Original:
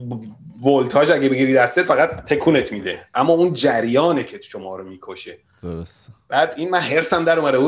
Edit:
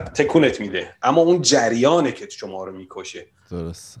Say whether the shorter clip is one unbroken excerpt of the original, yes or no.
yes